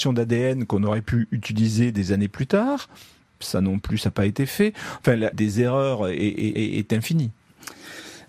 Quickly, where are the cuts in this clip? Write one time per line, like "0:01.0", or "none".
0:05.3
0:06.6

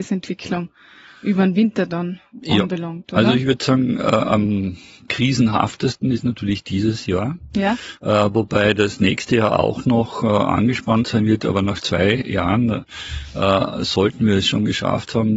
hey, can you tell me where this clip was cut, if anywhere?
none

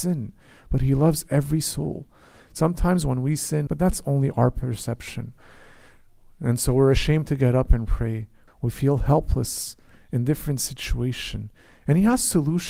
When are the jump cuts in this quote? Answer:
0:03.7
0:08.5

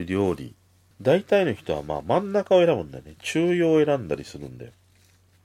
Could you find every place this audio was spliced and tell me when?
0:00.9

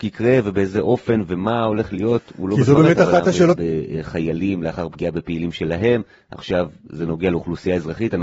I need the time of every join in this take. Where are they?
0:03.6

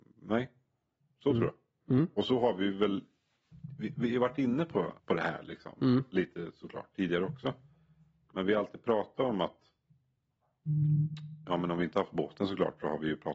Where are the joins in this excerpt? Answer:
0:05.0

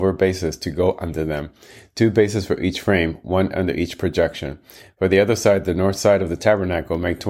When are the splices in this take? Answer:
none

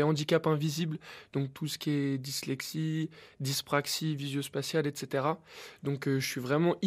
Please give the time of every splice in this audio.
none

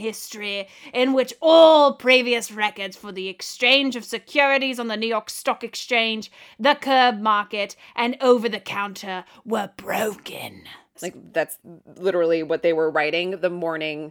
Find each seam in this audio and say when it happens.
0:10.9

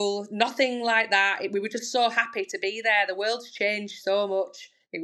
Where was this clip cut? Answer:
none

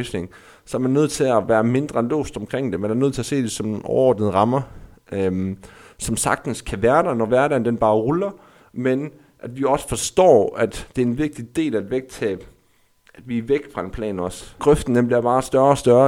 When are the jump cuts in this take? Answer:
0:14.6

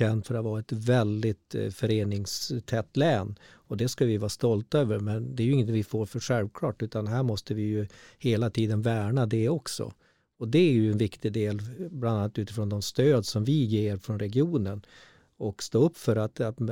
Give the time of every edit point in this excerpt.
none

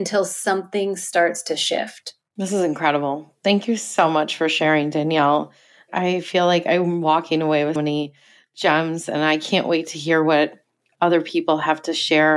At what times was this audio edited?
0:02.3
0:07.8

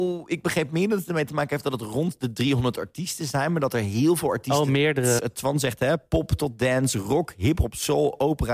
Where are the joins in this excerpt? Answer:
0:05.2

